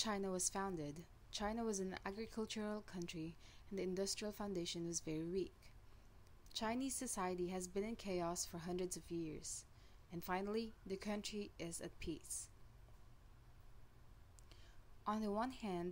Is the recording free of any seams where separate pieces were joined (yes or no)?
yes